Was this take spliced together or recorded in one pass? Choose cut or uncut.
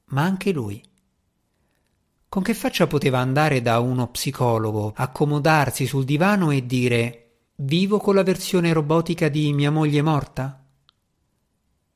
cut